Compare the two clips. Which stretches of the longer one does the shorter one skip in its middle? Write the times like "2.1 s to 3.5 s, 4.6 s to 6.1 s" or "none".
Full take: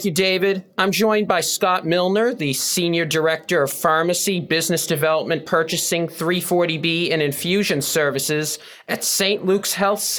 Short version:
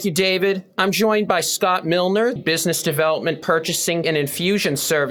2.4 s to 4.4 s, 6.1 s to 7.1 s

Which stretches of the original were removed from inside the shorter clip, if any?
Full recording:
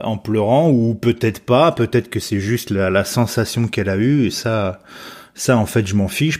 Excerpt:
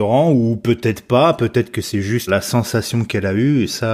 2.7 s to 2.9 s

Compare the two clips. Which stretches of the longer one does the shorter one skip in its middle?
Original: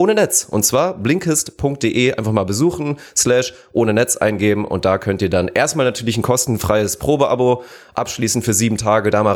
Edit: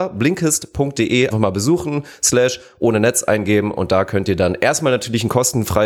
2.1 s to 2.2 s

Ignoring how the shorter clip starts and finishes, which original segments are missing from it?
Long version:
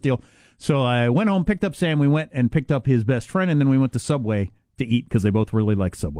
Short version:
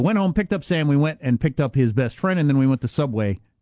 none

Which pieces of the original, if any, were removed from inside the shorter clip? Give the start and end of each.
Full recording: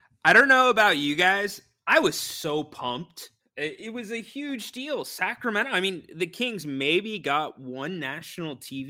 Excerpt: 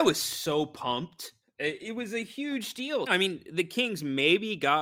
5.0 s to 5.7 s

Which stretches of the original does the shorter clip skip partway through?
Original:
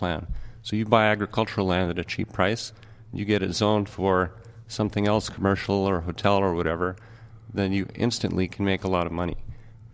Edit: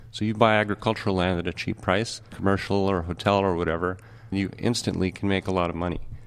2.8 s to 5.3 s, 7.3 s to 7.7 s

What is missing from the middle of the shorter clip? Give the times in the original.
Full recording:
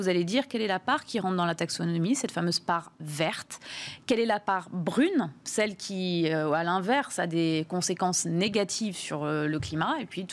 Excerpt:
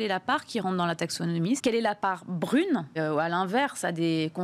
2.2 s to 4.0 s, 5.4 s to 6.3 s

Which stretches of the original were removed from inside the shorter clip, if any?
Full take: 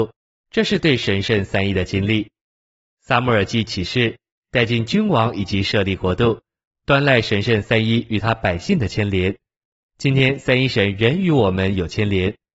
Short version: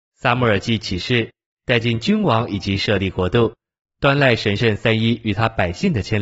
none

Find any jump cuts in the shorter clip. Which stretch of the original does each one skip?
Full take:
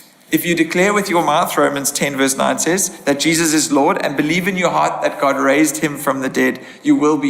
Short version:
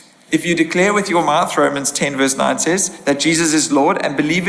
none

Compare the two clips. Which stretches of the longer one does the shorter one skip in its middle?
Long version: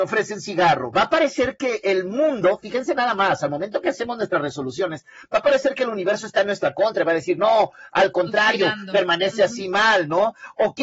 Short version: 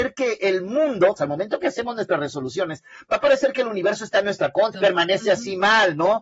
2.6 s to 3.4 s, 7.0 s to 8.9 s

